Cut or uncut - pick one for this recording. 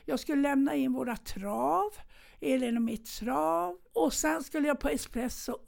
cut